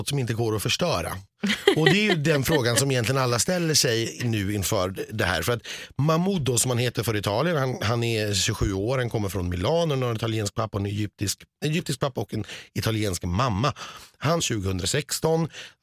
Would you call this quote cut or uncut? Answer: cut